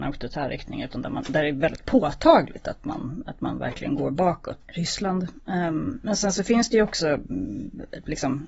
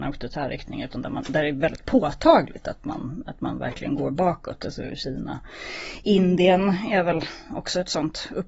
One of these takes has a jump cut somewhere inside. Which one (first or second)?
first